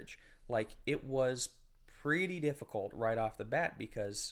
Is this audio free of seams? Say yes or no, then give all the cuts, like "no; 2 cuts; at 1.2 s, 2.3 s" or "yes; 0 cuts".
yes; 0 cuts